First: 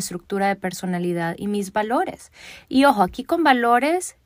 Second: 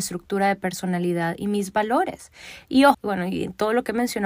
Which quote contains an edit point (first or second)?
second